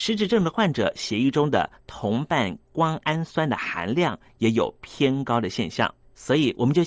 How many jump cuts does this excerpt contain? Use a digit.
0